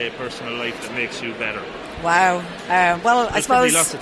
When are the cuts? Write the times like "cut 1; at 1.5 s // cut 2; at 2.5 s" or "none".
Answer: none